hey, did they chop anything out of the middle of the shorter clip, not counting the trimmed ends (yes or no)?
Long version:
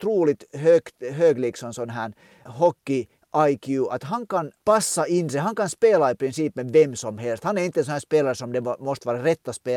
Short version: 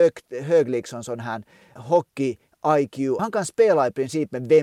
yes